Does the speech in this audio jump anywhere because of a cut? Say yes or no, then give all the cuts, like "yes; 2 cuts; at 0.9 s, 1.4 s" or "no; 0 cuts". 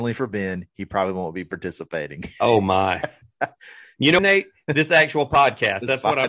yes; 1 cut; at 4.2 s